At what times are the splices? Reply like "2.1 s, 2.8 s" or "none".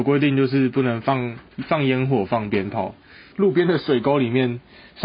3.3 s